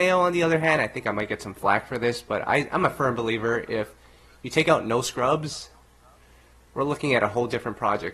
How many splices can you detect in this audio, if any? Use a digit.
0